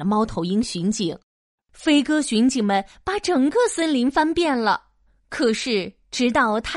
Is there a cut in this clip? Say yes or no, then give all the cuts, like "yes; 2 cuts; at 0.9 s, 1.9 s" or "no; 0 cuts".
yes; 1 cut; at 1.6 s